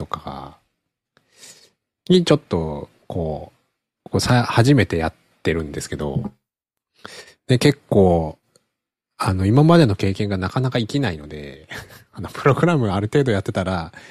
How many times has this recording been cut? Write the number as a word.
zero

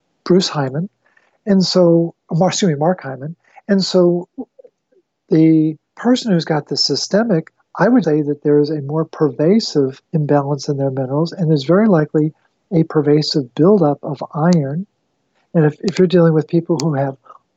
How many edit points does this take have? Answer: three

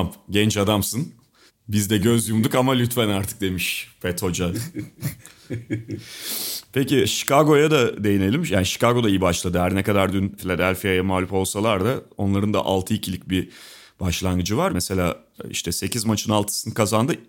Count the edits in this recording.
two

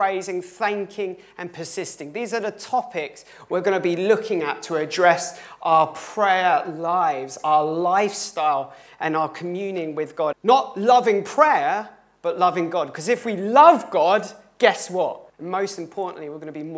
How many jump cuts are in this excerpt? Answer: two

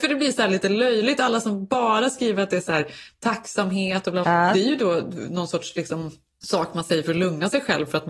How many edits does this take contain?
one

